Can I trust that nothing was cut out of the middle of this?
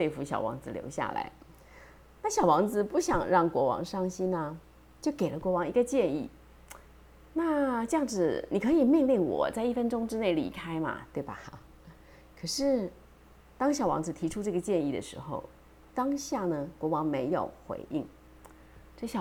yes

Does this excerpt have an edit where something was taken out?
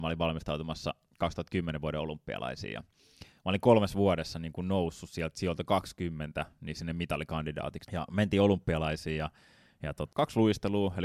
yes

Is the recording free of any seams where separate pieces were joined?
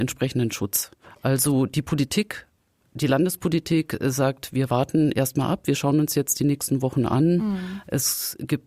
yes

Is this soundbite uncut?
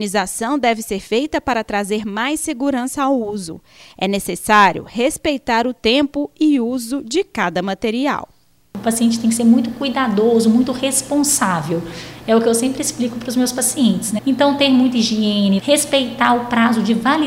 no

